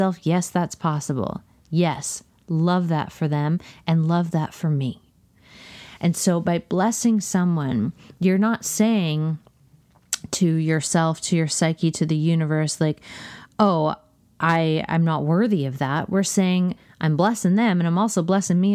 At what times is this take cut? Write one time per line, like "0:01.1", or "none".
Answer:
none